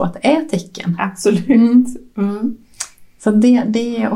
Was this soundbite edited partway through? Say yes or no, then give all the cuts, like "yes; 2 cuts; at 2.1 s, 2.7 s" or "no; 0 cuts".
no; 0 cuts